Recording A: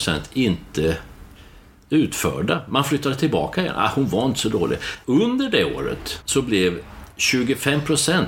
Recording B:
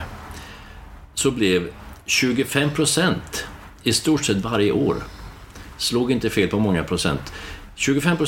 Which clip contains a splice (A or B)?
A